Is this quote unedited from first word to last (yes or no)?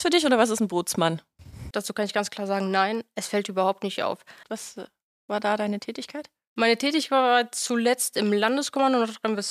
no